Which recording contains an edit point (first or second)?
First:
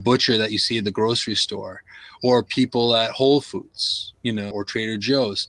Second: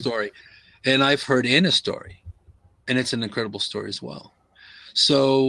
first